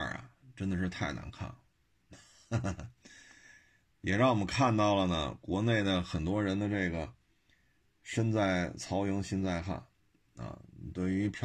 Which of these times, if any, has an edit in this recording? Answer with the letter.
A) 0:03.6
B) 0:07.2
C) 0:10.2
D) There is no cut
D